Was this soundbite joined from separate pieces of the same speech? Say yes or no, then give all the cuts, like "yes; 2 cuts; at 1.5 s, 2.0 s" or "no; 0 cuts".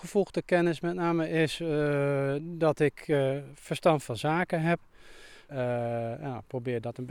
yes; 1 cut; at 5.5 s